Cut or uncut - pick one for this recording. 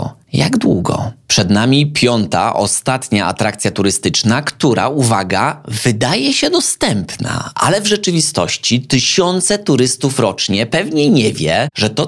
uncut